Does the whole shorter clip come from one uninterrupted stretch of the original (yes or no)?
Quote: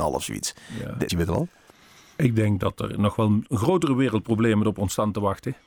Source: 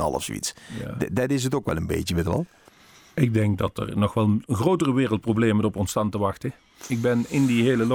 no